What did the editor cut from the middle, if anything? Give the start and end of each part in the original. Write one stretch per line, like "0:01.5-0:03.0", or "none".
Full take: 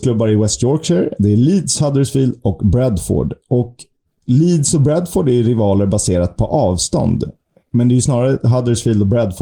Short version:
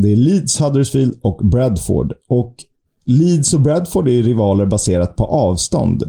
none